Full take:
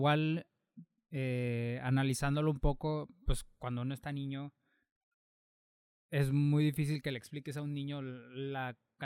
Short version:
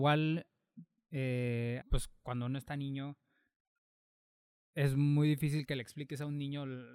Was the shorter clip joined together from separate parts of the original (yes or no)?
yes